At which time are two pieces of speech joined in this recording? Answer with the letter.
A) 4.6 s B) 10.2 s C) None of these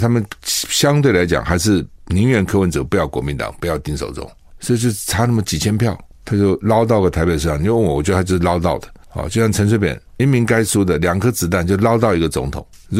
B